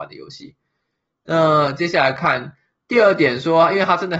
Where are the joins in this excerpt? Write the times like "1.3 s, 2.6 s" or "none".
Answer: none

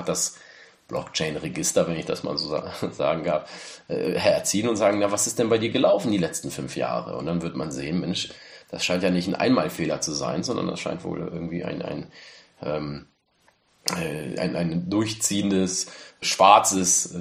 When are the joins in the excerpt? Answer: 14.4 s, 16.2 s

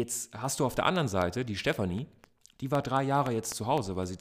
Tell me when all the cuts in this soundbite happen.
none

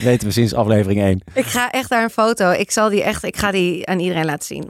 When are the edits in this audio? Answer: none

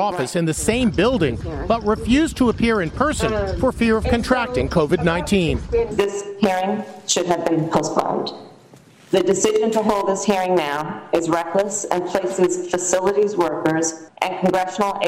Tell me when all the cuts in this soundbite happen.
14.1 s

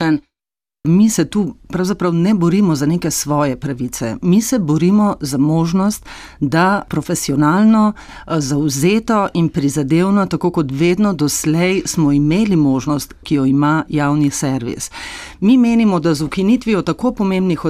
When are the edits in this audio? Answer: 13.2 s

